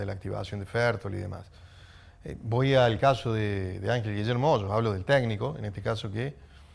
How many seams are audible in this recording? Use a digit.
0